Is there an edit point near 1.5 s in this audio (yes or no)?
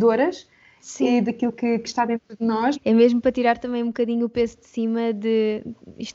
no